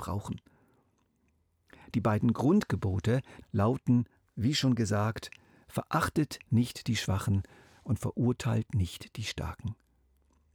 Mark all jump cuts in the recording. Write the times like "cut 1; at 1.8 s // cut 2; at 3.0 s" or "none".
cut 1; at 3.4 s